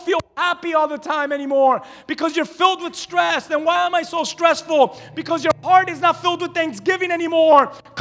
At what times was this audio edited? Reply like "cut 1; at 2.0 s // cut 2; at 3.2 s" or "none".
none